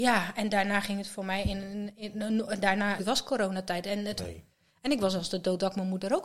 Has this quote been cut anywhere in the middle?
yes; 2 cuts; at 3.0 s, 4.2 s

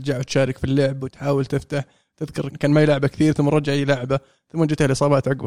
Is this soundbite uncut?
no; 1 cut; at 2.5 s

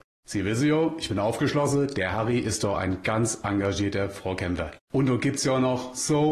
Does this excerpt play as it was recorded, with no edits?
no; 1 cut; at 4.8 s

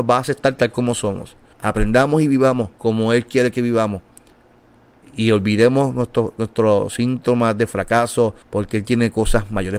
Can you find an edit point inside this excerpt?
yes; 3 cuts; at 1.5 s, 2.7 s, 8.4 s

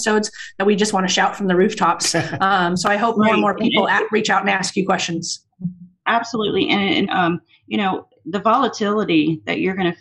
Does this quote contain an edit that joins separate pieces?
yes; 1 cut; at 7.1 s

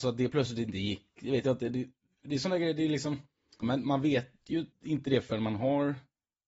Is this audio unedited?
no; 2 cuts; at 3.6 s, 4.7 s

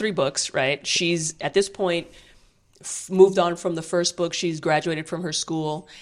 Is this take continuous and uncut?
yes; 0 cuts

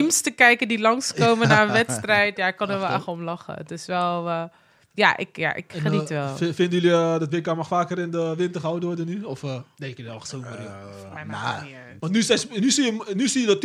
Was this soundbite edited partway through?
no; 0 cuts

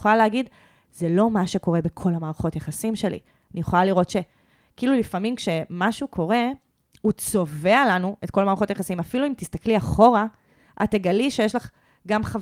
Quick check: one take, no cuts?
yes; 0 cuts

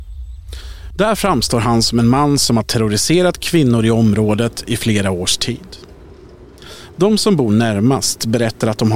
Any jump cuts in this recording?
yes; 1 cut; at 0.9 s

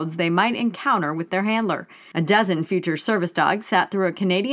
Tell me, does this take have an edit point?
yes; 1 cut; at 2.1 s

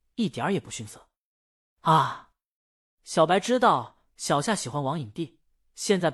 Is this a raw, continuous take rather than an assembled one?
yes; 0 cuts

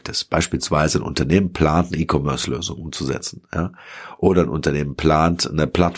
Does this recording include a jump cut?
no; 0 cuts

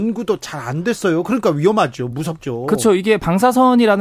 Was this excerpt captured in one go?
yes; 0 cuts

